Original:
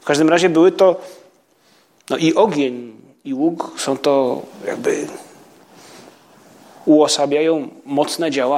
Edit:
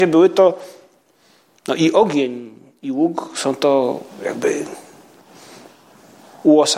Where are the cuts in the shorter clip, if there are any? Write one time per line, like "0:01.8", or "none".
none